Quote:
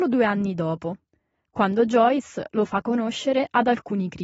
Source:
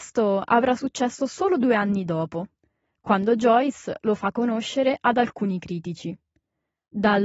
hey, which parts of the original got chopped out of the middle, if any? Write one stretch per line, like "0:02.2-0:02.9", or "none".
none